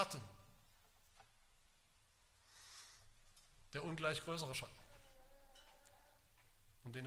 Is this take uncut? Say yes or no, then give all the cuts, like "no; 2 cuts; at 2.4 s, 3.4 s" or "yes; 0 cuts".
yes; 0 cuts